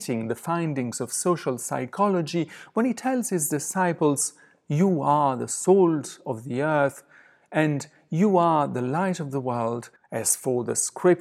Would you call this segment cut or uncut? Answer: cut